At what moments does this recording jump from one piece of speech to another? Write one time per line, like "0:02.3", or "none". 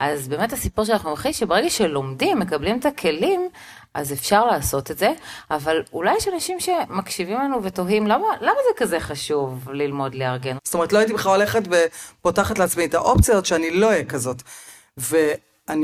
0:10.6